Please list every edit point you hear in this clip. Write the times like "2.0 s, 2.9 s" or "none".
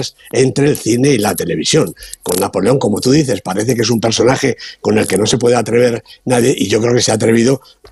none